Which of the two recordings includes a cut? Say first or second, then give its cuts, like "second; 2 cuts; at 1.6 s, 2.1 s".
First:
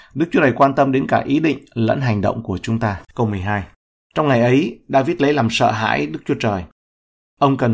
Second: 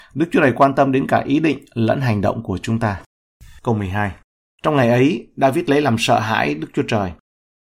first; 1 cut; at 3.1 s